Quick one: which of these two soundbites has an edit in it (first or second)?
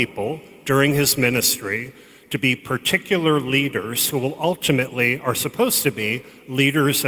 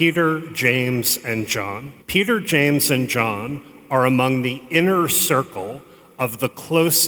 second